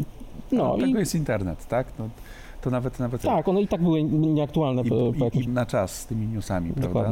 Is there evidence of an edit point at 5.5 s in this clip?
yes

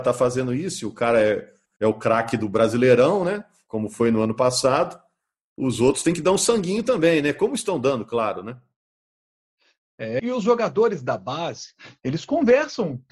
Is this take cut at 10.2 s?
yes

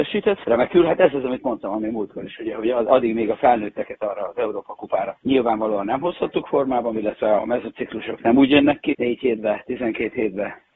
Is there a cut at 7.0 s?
yes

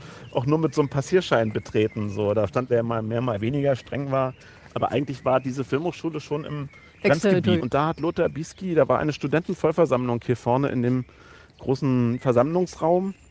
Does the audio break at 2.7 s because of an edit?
yes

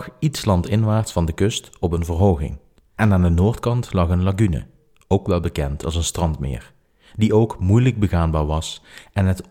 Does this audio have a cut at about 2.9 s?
yes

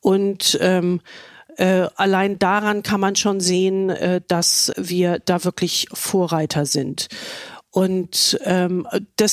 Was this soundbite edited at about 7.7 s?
no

